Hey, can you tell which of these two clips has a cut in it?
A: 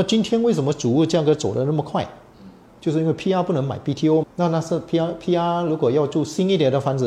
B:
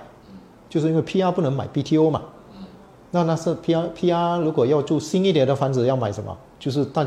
A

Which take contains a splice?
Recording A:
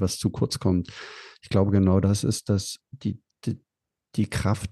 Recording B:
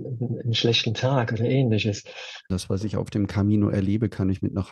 B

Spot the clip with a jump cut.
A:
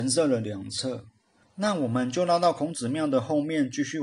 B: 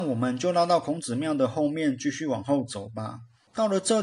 A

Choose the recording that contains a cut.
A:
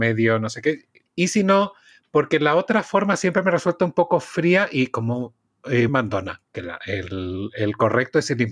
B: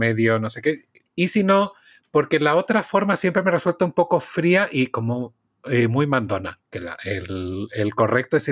A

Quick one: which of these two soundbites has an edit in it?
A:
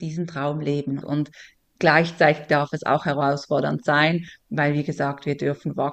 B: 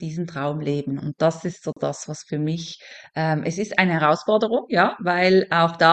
A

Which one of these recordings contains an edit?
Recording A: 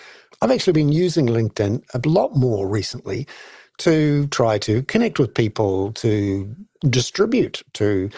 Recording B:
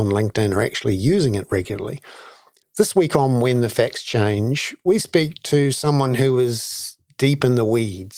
B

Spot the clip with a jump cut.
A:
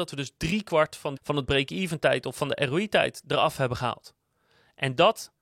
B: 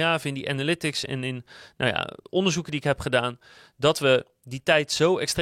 A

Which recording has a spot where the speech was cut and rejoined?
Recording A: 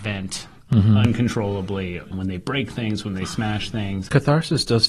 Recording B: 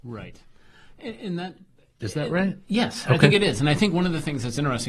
A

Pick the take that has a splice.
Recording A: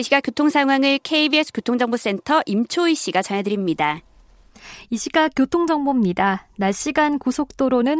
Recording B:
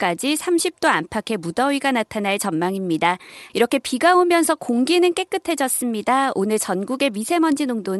B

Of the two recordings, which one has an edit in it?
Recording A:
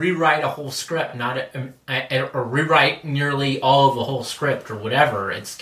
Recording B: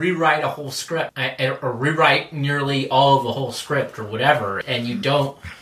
B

